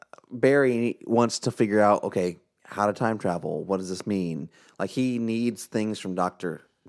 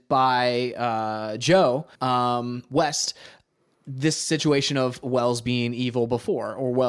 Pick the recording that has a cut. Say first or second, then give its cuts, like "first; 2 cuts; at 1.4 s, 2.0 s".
second; 1 cut; at 1.9 s